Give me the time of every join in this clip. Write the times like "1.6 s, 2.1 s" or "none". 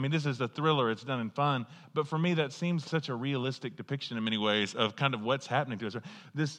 2.8 s

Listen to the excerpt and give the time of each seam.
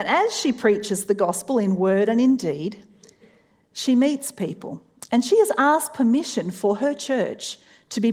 none

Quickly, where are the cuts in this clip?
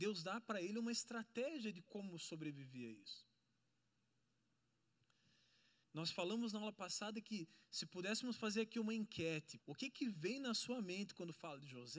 5.8 s, 9.6 s

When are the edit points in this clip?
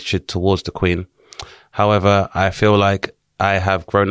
none

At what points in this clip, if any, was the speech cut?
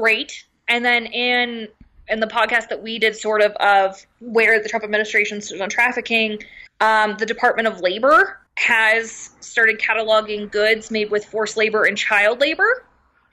6.7 s, 8.5 s

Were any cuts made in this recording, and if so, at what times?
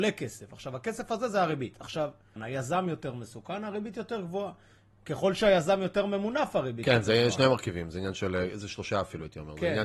2.4 s

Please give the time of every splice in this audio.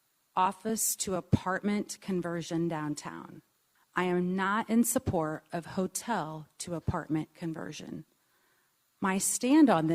3.8 s

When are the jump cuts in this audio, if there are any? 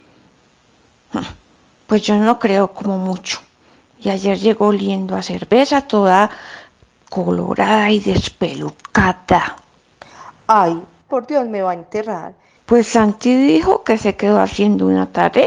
11.1 s, 12.6 s

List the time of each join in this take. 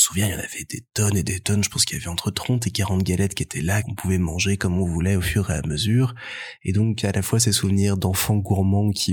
3.8 s

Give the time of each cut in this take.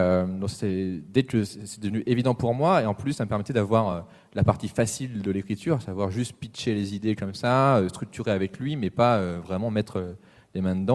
none

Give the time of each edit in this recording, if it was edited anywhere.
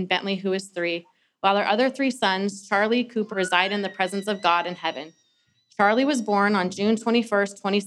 3.3 s

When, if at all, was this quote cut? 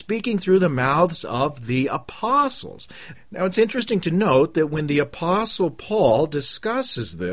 3.1 s

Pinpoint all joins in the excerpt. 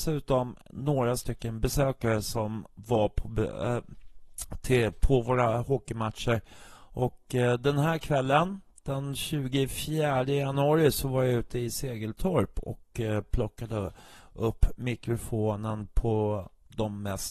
none

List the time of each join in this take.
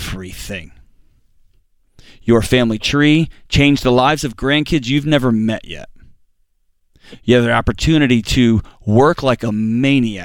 none

